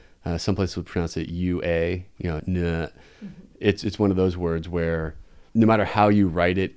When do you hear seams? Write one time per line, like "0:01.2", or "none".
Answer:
0:02.4